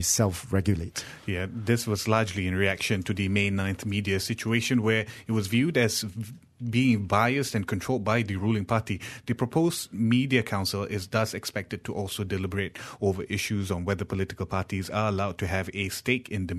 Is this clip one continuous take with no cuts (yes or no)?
yes